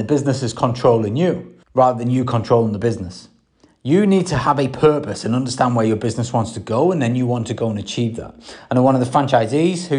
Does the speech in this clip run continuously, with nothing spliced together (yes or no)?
no